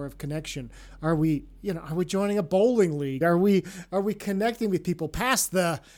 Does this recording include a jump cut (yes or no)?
no